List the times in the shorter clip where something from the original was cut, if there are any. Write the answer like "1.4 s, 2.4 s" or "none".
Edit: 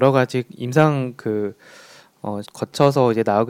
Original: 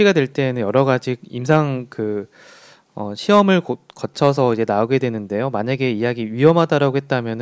2.4 s